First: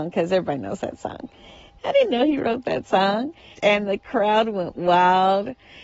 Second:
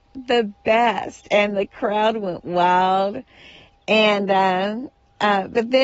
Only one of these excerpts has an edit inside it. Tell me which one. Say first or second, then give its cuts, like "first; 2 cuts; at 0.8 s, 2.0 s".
first; 2 cuts; at 1.8 s, 3.5 s